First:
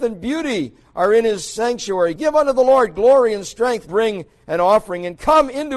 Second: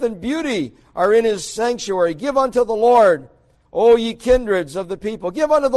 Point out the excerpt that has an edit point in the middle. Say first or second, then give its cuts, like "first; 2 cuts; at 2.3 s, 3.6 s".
first; 2 cuts; at 2.2 s, 3.9 s